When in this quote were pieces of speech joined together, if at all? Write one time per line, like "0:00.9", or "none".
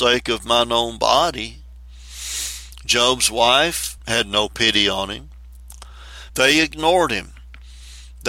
0:04.0
0:06.3